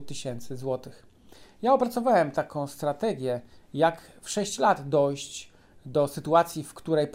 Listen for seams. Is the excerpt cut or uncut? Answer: uncut